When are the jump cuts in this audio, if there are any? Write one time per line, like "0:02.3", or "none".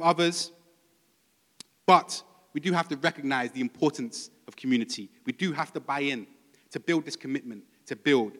none